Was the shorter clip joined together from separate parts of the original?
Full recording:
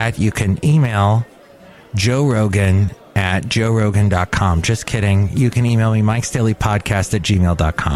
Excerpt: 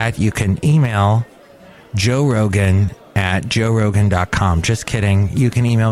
no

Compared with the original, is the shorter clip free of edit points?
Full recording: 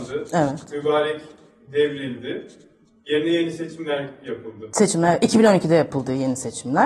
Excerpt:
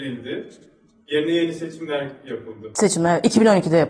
yes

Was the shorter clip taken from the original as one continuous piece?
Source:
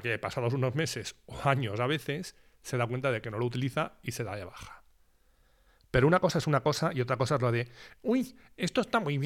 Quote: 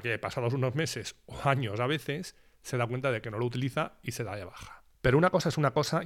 no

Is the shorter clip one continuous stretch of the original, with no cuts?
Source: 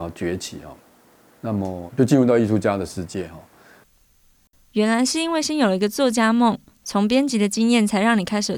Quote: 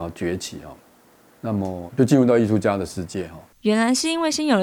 no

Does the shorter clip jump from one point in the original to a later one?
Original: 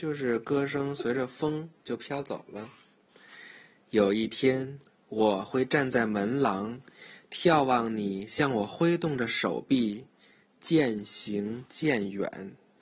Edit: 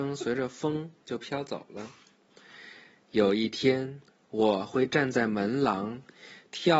no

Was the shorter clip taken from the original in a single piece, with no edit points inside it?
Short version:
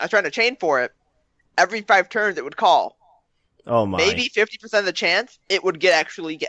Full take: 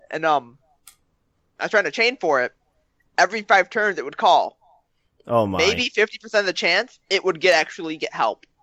yes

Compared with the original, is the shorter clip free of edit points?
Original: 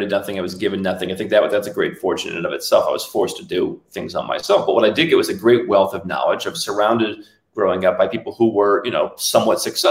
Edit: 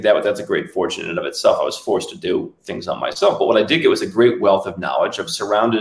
yes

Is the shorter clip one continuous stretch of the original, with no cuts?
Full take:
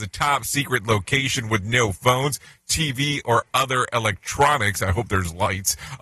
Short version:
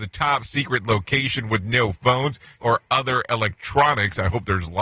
no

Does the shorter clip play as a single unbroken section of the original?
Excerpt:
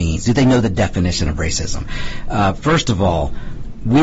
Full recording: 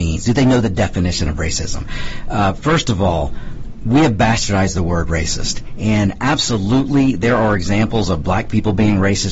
yes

